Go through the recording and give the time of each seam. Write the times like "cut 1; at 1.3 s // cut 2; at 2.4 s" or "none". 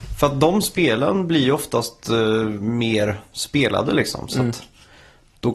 none